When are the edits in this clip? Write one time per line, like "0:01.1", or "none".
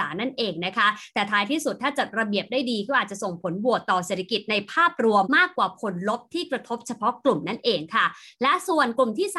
0:05.2